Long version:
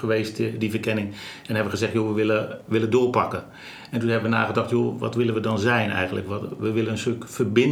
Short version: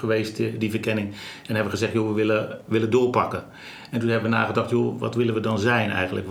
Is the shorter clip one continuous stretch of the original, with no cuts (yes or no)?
yes